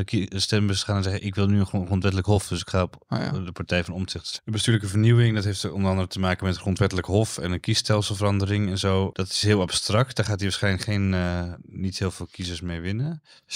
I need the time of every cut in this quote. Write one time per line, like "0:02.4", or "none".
0:04.4
0:09.1